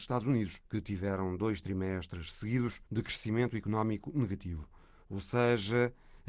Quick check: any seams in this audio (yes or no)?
yes